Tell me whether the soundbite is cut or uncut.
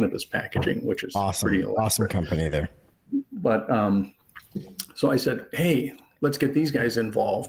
uncut